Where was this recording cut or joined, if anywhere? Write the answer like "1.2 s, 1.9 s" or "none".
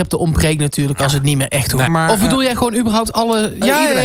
1.9 s